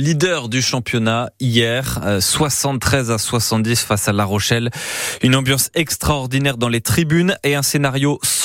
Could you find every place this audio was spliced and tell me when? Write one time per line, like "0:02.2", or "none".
none

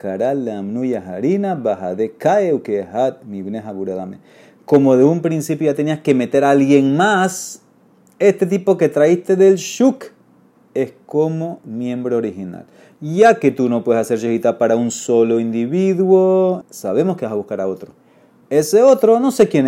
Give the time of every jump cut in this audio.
0:16.6

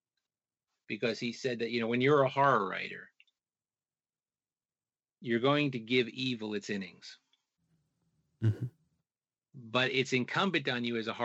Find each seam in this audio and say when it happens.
none

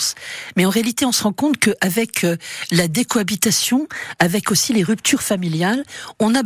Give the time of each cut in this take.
none

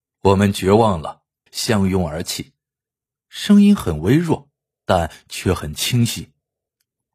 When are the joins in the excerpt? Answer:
0:01.5
0:03.2

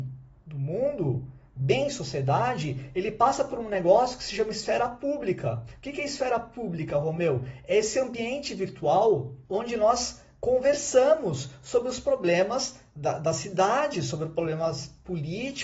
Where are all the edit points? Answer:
0:09.5

